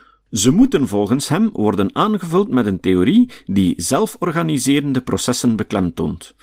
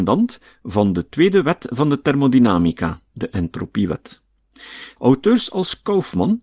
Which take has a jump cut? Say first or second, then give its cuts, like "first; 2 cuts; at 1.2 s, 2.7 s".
second; 2 cuts; at 3.1 s, 5.0 s